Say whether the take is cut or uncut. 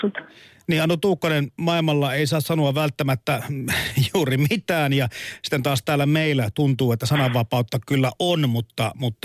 uncut